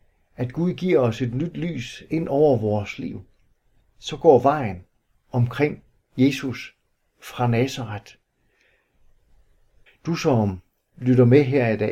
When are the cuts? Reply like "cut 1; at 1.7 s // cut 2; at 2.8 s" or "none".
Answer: cut 1; at 9.9 s